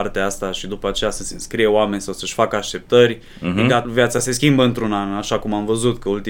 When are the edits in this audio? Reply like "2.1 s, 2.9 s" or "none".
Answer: 3.8 s

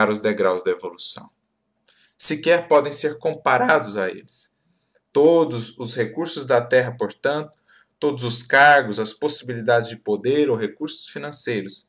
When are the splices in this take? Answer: 2.0 s

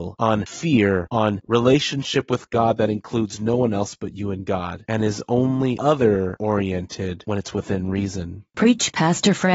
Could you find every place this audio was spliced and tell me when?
none

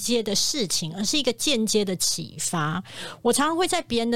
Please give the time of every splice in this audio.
none

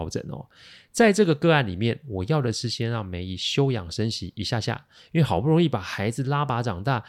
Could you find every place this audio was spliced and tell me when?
none

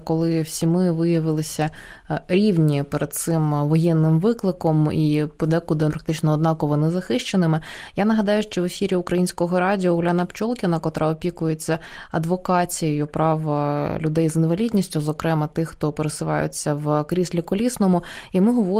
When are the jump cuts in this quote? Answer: 5.9 s

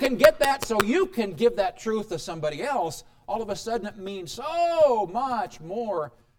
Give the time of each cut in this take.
none

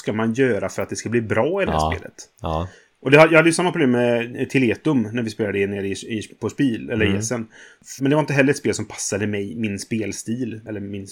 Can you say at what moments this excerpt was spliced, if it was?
8.0 s

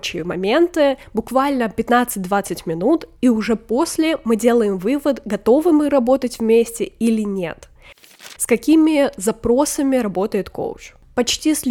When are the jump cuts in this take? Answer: 8.4 s

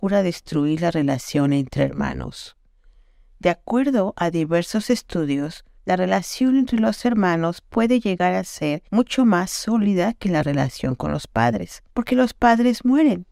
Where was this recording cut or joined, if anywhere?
5.8 s, 8.9 s, 11.9 s

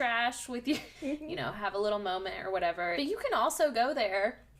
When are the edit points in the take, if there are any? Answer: 0.9 s, 2.9 s

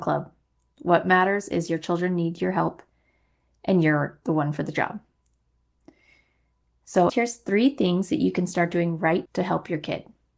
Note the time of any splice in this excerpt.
7.1 s, 9.3 s

